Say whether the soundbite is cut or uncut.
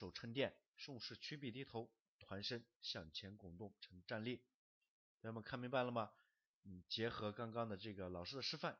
uncut